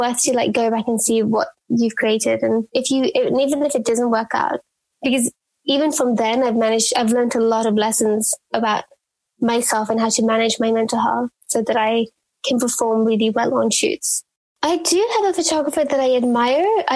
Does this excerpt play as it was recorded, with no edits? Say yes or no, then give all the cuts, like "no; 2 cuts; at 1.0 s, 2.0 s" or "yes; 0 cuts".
no; 2 cuts; at 4.9 s, 14.4 s